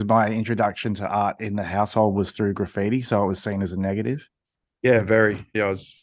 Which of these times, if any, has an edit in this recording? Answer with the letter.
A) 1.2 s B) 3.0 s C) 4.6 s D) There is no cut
C